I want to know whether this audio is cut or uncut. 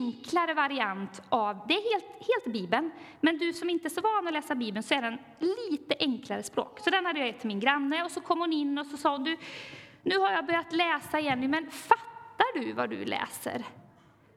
uncut